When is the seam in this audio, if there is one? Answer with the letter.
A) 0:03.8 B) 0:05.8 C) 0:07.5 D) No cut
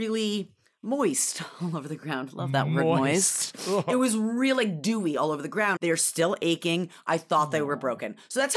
B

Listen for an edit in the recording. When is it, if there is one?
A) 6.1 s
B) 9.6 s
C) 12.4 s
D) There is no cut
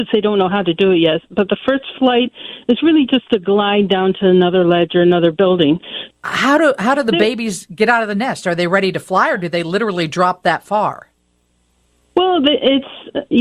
A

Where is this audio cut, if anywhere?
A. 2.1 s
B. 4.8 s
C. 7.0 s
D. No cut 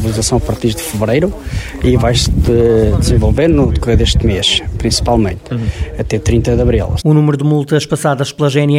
C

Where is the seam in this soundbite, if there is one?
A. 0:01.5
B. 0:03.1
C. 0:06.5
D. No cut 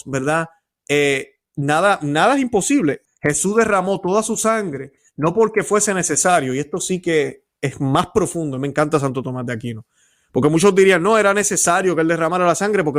B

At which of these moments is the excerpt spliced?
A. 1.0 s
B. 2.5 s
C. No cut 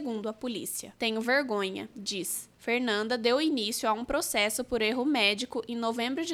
A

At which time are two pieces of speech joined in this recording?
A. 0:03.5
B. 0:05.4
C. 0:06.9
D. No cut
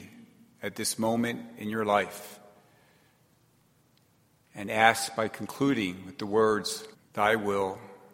C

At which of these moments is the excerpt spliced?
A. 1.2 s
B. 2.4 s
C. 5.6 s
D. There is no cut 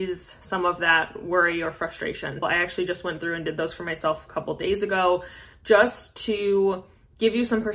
B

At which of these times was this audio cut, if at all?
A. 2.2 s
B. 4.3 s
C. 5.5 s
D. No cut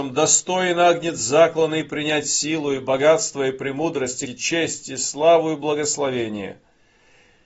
B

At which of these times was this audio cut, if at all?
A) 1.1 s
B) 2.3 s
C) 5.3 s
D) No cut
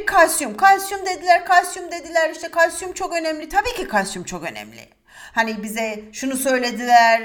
C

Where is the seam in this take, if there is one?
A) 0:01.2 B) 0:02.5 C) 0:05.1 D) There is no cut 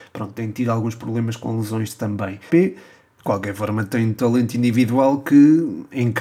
B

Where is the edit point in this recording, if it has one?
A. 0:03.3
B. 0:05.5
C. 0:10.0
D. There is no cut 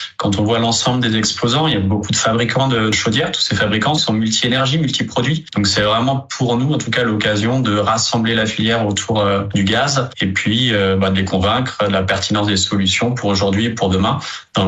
B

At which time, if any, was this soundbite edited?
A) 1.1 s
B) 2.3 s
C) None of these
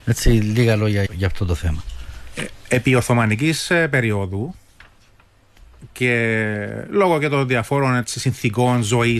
A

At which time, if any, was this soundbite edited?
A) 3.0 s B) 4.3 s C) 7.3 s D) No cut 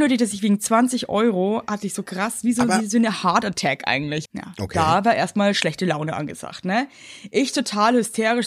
B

